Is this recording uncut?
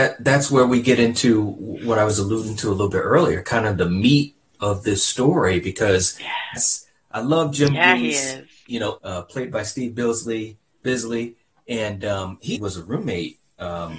no; 3 cuts; at 6.6 s, 9.0 s, 12.6 s

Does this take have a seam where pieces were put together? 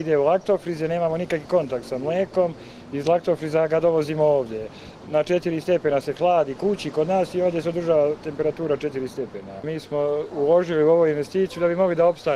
no; 0 cuts

